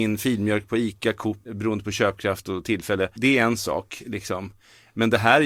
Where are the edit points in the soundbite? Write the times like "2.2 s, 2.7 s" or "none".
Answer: 1.5 s, 3.2 s